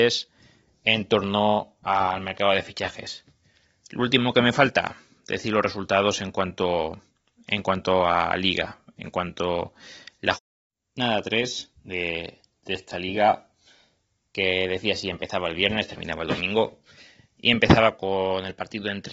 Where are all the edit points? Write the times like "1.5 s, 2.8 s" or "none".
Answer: none